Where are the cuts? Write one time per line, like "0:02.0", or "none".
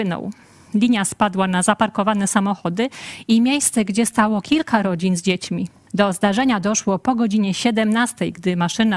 0:05.9